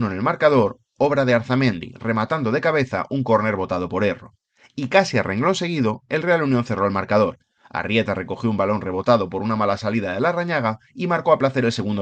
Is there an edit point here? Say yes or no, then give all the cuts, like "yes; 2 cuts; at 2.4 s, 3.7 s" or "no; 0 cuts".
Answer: no; 0 cuts